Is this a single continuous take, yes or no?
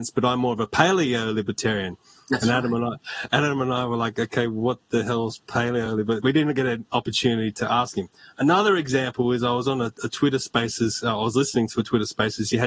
yes